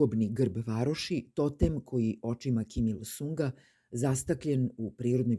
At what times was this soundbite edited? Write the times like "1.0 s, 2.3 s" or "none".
none

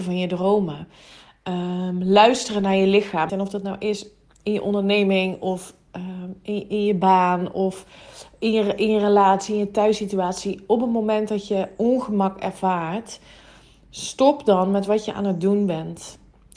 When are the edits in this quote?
3.3 s

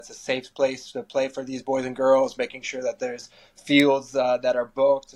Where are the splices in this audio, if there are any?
none

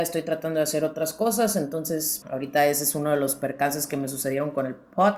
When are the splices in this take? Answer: 2.2 s

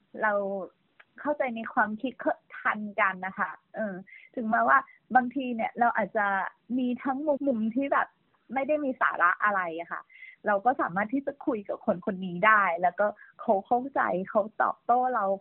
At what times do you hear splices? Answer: 7.4 s

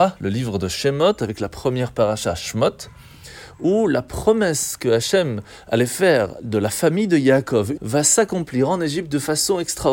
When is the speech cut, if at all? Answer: 7.8 s

